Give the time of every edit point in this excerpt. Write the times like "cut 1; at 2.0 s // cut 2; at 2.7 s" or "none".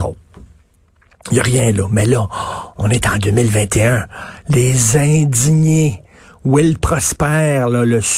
none